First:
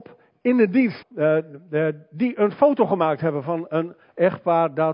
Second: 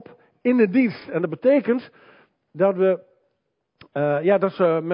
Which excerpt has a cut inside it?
first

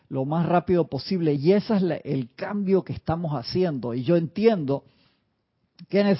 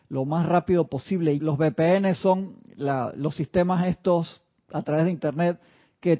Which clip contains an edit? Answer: second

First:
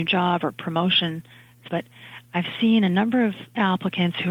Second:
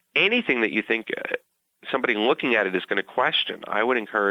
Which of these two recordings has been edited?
first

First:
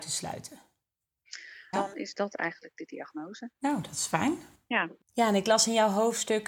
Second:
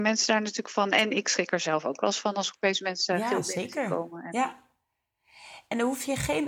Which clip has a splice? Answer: first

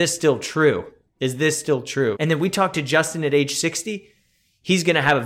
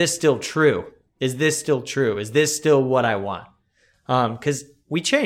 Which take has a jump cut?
first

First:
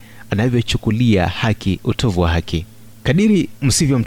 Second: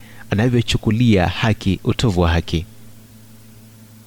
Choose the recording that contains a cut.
first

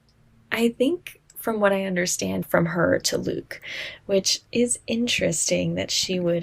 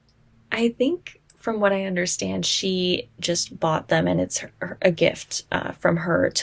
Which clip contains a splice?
first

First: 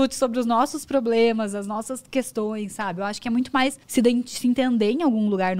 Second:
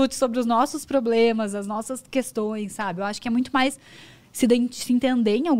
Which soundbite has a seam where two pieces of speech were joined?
first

